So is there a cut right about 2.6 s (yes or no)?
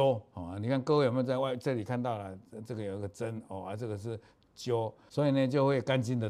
no